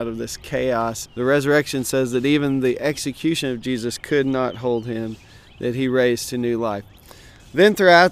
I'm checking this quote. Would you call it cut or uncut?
cut